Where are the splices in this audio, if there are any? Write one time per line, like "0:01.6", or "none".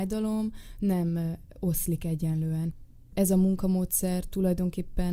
none

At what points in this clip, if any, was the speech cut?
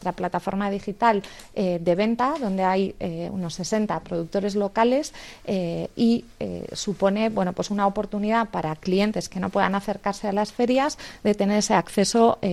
none

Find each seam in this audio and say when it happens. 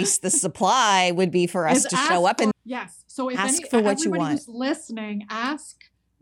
0:02.5

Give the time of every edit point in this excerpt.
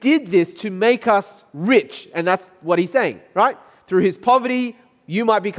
none

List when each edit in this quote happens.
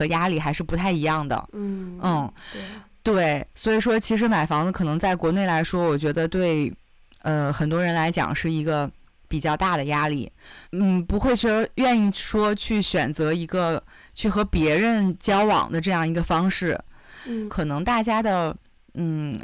0:10.6
0:17.5

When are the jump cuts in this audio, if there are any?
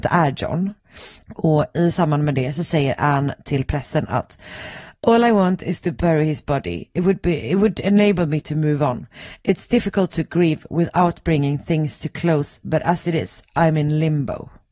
0:01.2

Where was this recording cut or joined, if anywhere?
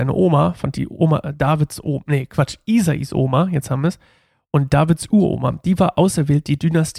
none

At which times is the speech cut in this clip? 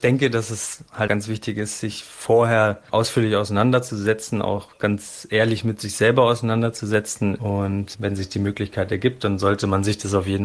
0:01.1

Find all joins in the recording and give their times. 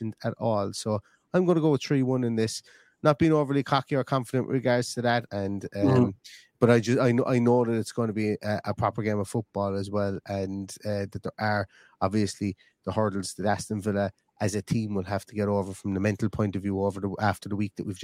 0:05.3

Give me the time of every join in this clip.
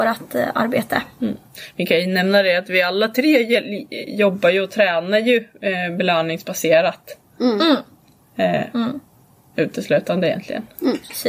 none

